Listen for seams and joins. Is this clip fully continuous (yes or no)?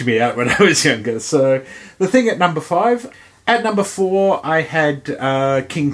yes